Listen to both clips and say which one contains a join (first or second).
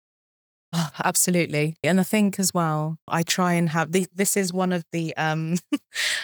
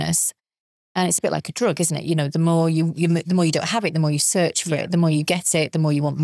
first